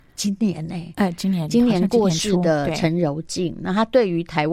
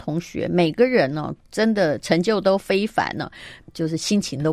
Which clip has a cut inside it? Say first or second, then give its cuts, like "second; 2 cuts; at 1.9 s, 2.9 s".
second; 1 cut; at 3.6 s